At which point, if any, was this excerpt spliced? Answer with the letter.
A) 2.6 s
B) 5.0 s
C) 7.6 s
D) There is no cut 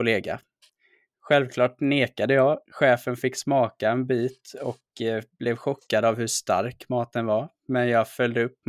D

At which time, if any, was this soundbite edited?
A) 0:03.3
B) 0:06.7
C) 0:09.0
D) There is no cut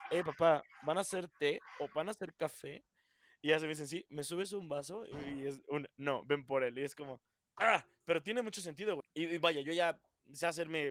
C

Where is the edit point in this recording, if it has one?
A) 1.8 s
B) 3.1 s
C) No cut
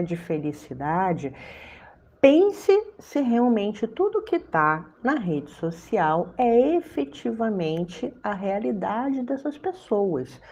C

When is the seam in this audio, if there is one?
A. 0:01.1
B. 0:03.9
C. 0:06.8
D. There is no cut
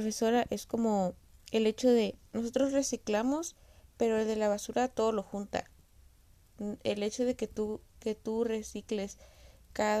D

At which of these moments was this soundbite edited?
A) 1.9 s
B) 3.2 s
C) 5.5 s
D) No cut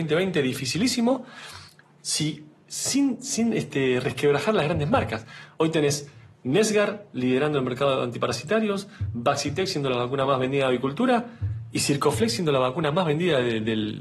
D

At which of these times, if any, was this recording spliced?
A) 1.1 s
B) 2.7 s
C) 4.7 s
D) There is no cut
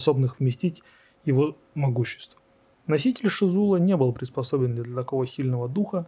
B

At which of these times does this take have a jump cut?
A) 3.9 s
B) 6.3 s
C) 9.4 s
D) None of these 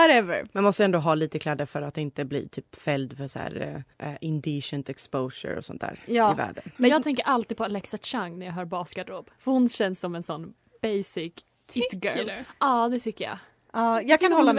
A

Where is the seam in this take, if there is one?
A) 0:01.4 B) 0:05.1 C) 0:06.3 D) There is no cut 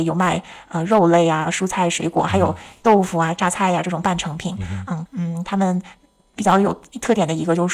B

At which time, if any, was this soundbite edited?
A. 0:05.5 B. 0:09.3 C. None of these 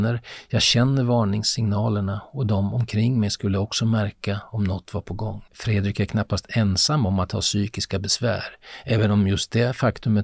A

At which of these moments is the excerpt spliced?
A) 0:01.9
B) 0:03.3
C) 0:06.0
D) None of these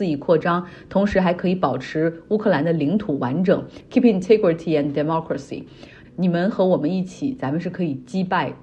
C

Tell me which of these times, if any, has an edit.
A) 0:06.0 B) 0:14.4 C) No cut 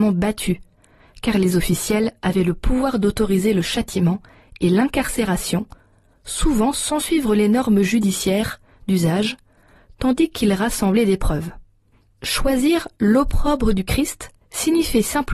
B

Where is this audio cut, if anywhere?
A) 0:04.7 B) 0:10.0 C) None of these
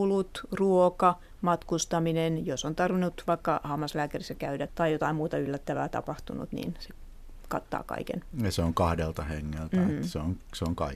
A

